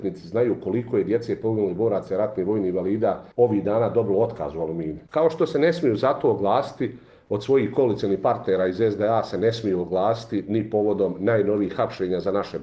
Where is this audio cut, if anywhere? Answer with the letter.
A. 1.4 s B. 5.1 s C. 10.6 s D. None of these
B